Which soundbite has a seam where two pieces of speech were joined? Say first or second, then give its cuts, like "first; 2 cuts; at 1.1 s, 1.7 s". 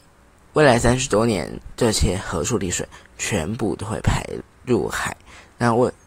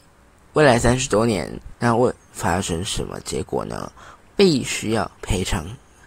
second; 2 cuts; at 1.7 s, 4.2 s